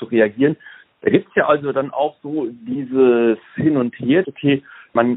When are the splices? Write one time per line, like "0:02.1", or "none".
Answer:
0:00.9
0:04.2